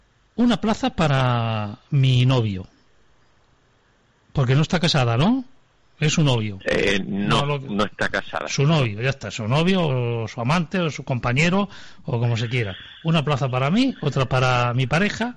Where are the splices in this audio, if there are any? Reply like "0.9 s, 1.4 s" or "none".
none